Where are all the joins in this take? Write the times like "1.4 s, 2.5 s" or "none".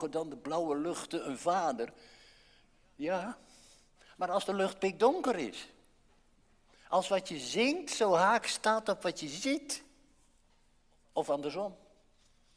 none